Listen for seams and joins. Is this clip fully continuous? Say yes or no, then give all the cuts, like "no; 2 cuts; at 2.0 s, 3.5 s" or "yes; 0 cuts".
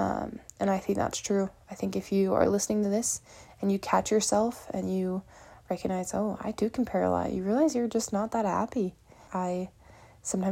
no; 1 cut; at 9.3 s